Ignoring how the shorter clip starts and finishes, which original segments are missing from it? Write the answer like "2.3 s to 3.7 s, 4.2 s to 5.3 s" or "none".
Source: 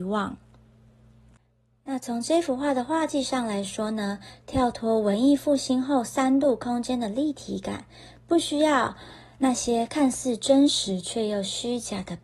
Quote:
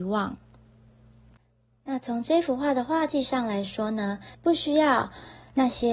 4.3 s to 8.2 s